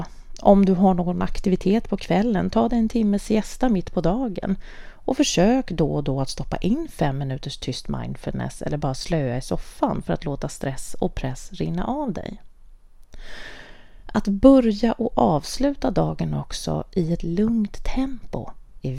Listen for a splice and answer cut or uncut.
uncut